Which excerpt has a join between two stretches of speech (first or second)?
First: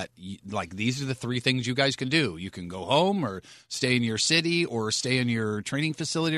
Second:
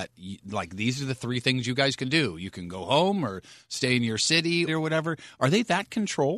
second